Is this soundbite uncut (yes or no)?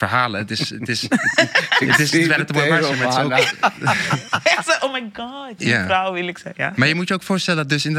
no